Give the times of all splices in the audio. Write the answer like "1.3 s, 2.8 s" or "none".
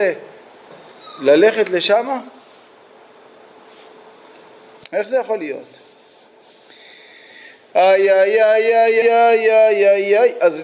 9.0 s